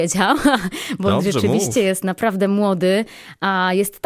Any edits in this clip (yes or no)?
no